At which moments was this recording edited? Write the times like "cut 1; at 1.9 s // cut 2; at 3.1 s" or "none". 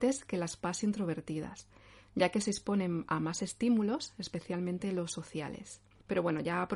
none